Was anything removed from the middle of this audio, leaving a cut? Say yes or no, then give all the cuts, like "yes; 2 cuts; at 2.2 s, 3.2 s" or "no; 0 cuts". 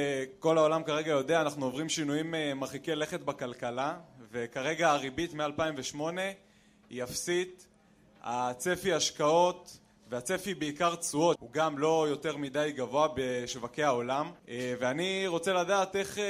yes; 2 cuts; at 11.4 s, 14.4 s